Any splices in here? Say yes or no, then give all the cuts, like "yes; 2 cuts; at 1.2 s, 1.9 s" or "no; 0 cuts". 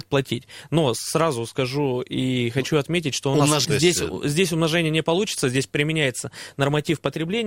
yes; 1 cut; at 3.6 s